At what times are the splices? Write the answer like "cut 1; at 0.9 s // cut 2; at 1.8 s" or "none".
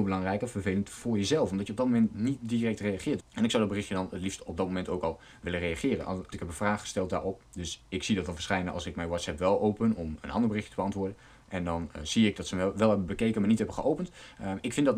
cut 1; at 3.2 s // cut 2; at 6.3 s